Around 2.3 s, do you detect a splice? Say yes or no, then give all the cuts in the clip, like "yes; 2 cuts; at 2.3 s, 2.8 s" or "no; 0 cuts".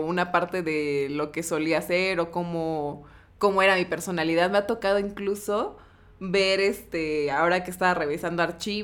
no; 0 cuts